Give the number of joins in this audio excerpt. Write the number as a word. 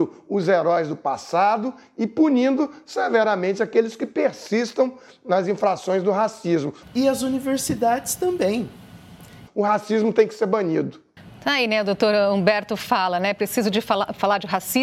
two